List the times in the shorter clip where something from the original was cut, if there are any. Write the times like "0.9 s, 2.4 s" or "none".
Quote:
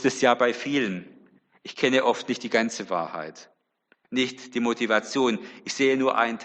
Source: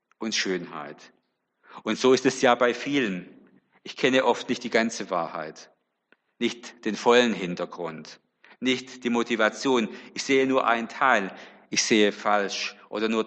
4.0 s